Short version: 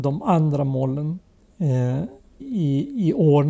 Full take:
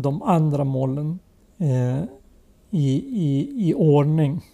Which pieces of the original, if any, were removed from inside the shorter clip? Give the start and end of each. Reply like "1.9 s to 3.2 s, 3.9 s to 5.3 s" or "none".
2.4 s to 3.0 s